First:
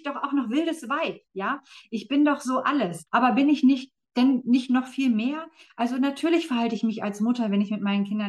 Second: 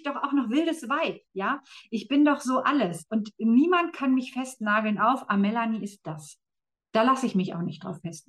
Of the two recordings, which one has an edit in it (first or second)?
first